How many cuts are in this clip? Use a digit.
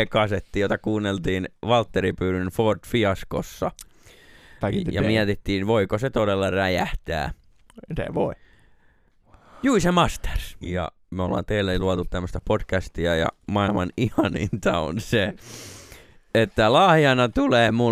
1